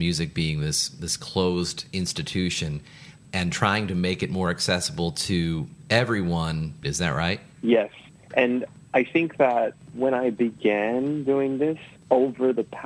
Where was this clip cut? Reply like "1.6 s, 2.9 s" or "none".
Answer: 6.8 s